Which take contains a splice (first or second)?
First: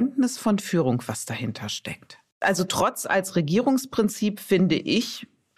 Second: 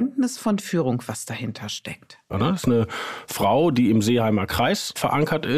second